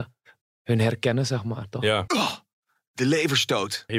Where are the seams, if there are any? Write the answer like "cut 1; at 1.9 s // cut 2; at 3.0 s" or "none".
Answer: cut 1; at 2.1 s

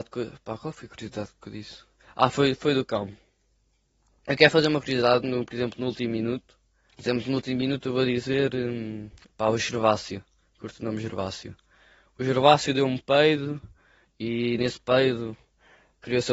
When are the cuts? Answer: cut 1; at 6.9 s

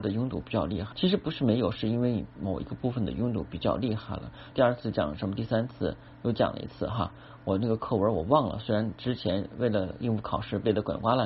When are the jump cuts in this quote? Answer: cut 1; at 0.9 s // cut 2; at 4.5 s

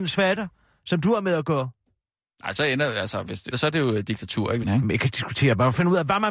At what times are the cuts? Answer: cut 1; at 3.5 s // cut 2; at 4.6 s

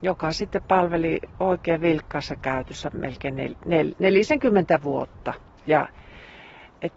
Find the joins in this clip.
none

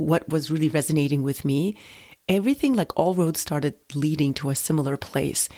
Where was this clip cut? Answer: none

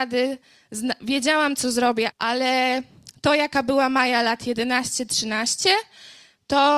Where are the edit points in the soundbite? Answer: cut 1; at 2.1 s // cut 2; at 5.1 s

